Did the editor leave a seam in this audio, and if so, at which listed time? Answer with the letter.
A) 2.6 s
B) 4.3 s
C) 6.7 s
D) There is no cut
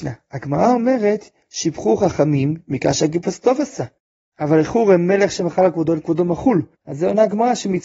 C